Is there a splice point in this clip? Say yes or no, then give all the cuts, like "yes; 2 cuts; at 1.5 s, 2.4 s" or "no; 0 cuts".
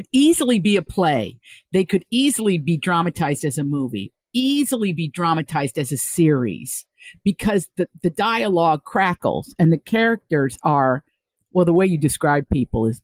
no; 0 cuts